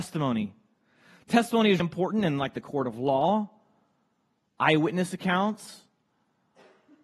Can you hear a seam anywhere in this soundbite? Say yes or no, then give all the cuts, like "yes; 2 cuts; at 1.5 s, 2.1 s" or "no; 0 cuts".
yes; 1 cut; at 1.8 s